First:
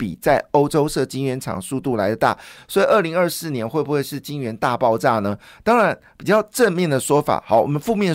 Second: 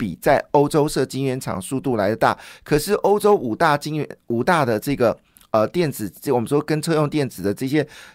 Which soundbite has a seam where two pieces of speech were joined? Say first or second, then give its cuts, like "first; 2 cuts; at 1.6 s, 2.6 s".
first; 1 cut; at 2.6 s